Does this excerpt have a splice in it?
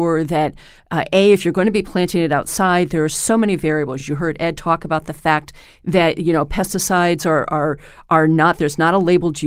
no; 0 cuts

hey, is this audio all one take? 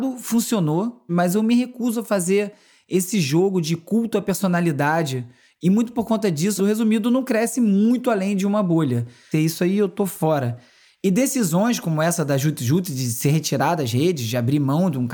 no; 3 cuts; at 1.1 s, 6.6 s, 9.3 s

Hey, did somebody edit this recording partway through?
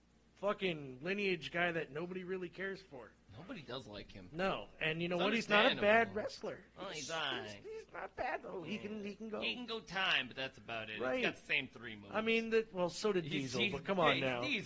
no; 0 cuts

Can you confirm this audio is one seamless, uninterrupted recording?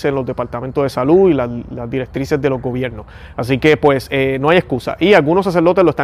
yes; 0 cuts

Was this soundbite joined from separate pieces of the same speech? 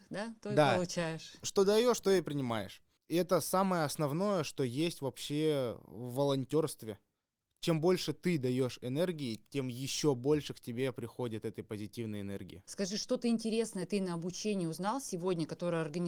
yes; 1 cut; at 12.6 s

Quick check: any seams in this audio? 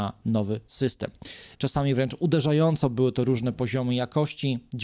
yes; 1 cut; at 1.5 s

